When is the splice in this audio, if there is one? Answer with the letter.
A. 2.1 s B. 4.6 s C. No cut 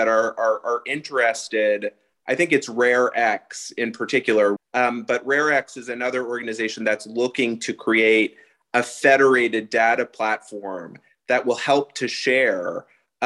B